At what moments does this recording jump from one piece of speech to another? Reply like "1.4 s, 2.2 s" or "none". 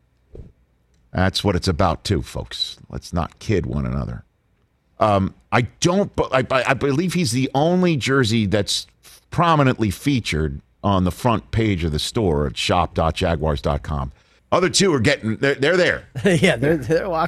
4.9 s, 14.4 s

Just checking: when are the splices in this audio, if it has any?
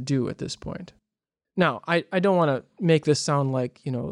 1.4 s

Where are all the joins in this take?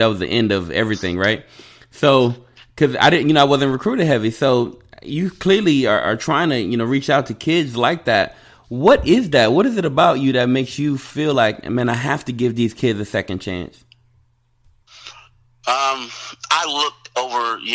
none

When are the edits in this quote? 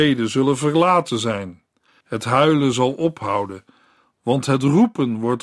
2.0 s

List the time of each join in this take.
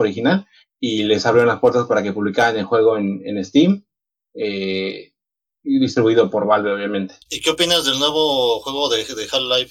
7.2 s

